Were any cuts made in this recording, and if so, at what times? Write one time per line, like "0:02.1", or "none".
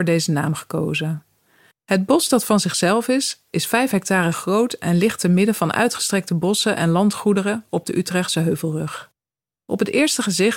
0:01.7